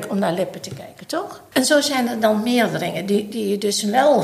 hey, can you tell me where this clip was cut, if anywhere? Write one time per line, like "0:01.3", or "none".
0:01.5